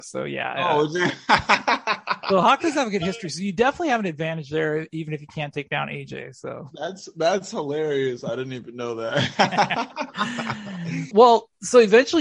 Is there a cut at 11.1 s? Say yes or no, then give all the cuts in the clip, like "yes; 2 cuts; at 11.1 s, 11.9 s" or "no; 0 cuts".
yes; 1 cut; at 11.1 s